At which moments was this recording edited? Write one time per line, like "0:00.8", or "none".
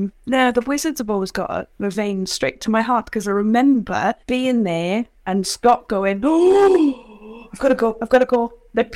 0:04.2